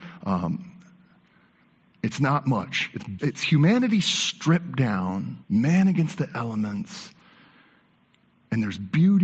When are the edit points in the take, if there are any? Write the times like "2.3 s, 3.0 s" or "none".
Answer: 3.2 s, 5.4 s